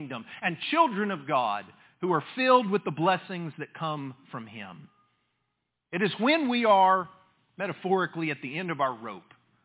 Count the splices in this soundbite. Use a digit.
0